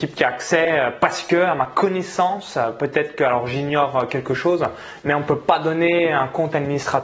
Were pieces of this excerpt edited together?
no; 0 cuts

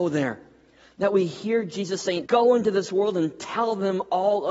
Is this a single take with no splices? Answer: no; 1 cut; at 2.3 s

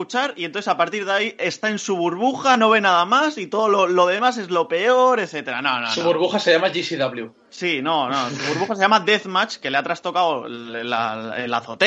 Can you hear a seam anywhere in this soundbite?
no; 0 cuts

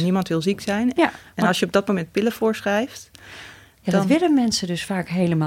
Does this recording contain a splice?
yes; 1 cut; at 0.9 s

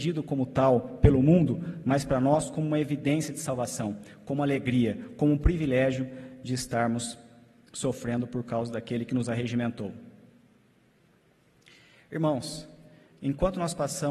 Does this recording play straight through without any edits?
yes; 0 cuts

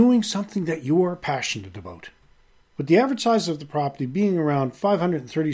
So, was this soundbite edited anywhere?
yes; 1 cut; at 2.6 s

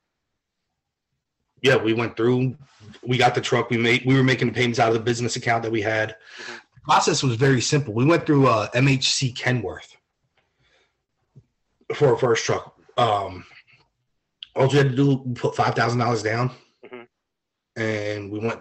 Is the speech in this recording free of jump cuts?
yes; 0 cuts

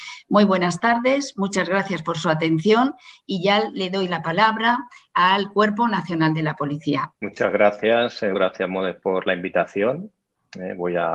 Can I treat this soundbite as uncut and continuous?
no; 2 cuts; at 7.1 s, 8.3 s

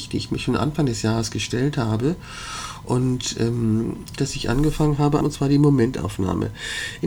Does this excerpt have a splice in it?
yes; 2 cuts; at 4.2 s, 5.2 s

